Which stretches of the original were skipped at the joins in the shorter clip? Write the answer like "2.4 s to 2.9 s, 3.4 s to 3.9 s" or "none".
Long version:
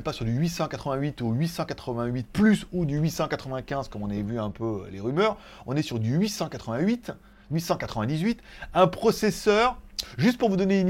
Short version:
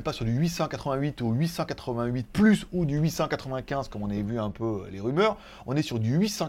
none